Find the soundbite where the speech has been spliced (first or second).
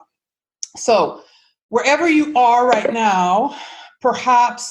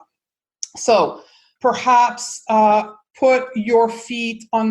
second